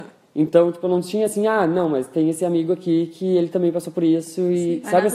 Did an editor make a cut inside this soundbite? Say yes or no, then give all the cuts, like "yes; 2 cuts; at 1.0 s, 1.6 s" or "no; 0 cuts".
no; 0 cuts